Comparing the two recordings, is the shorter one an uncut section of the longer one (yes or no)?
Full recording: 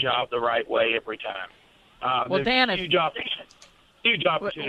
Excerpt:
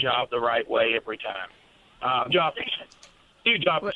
no